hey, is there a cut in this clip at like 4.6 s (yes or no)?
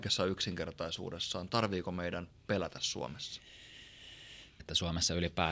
yes